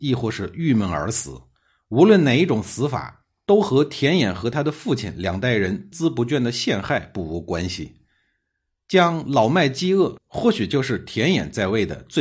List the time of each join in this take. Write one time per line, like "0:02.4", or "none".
0:05.9
0:10.2